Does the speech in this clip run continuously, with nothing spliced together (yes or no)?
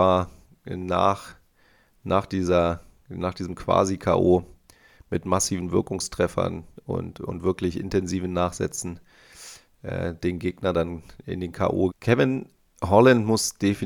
no